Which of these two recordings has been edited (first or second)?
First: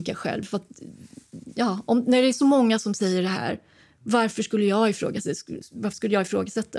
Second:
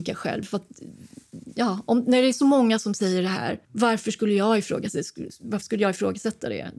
second